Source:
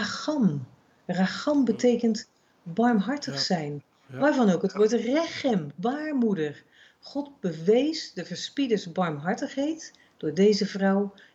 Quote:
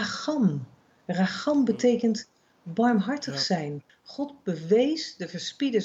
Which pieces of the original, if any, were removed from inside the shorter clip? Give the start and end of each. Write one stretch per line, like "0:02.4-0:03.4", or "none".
0:03.9-0:06.9